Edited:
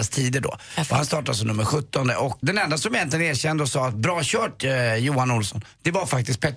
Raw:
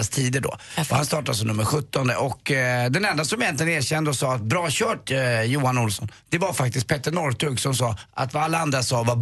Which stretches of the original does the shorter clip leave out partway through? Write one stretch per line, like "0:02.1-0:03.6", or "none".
0:02.4-0:02.9